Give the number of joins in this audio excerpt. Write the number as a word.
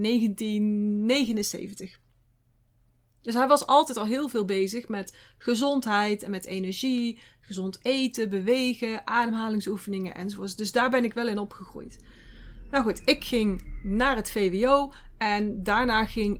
zero